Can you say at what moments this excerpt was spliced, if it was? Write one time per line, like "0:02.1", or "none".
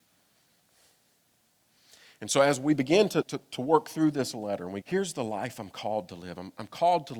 0:03.2
0:04.8